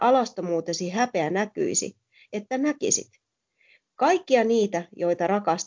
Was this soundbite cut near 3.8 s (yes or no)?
no